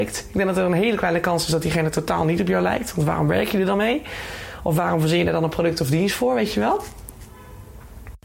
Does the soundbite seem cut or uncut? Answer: uncut